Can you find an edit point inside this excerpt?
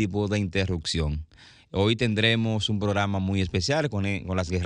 no; 0 cuts

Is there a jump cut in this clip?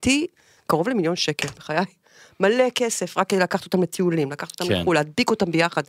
no; 0 cuts

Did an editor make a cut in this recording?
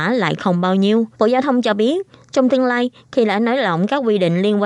yes; 1 cut; at 1.1 s

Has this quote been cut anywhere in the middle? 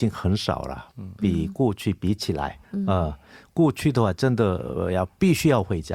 yes; 1 cut; at 2.6 s

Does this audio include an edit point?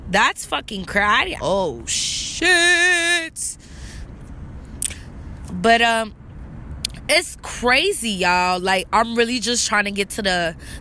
yes; 1 cut; at 1.4 s

